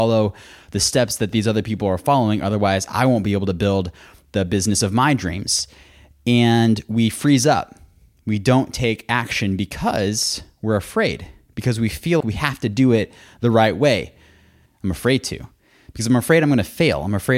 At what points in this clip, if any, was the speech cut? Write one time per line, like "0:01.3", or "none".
0:12.2
0:14.7